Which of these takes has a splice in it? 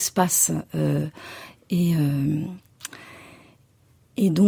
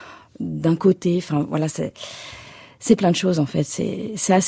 second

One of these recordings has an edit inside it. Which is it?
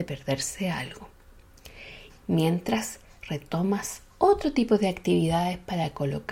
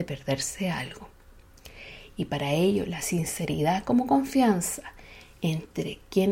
first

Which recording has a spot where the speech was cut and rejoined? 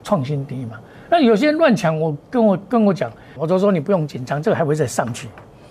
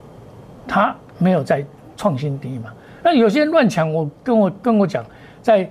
first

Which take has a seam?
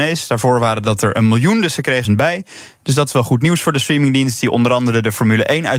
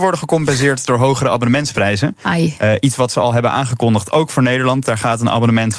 first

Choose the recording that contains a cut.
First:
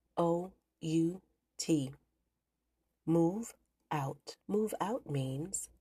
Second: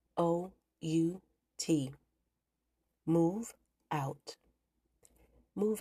first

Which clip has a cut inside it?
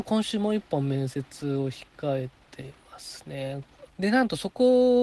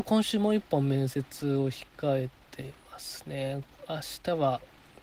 first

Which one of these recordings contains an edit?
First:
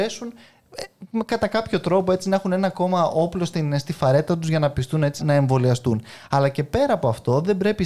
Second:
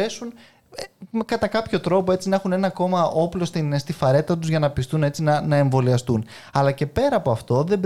first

